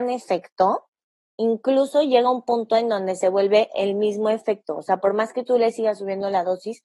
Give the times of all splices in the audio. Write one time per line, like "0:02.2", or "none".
none